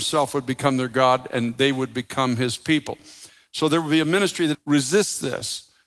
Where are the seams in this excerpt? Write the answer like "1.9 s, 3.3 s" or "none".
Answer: 4.5 s